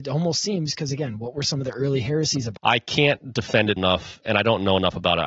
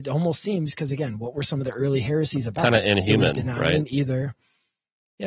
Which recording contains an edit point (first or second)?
first